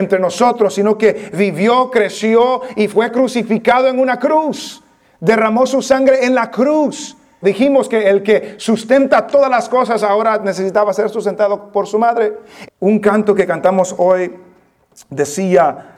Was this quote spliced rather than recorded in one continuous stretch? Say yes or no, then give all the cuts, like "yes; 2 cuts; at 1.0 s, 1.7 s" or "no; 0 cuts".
yes; 2 cuts; at 7.4 s, 12.7 s